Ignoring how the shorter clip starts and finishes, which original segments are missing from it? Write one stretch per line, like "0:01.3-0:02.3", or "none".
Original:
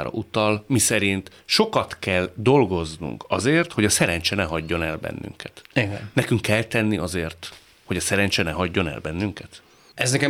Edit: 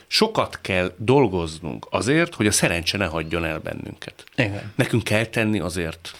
none